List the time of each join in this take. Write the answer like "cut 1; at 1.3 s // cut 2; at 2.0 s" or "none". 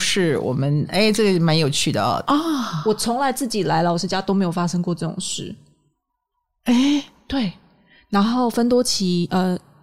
cut 1; at 2.2 s